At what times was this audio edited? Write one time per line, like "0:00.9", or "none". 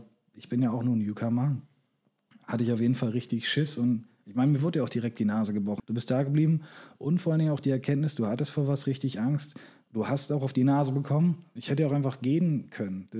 0:05.8
0:11.6